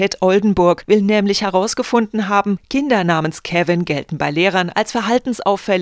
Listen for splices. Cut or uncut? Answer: uncut